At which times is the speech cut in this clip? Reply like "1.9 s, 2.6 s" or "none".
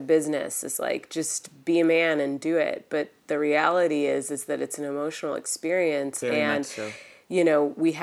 none